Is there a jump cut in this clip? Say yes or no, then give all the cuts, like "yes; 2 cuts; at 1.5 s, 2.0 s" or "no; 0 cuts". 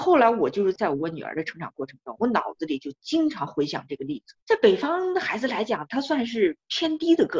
yes; 1 cut; at 4.4 s